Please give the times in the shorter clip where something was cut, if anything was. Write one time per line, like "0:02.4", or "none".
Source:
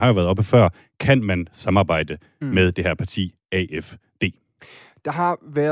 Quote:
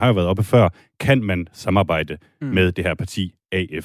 none